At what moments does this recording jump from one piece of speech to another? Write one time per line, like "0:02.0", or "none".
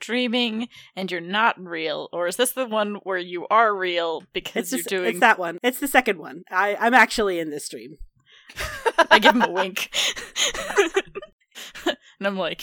0:08.5
0:11.5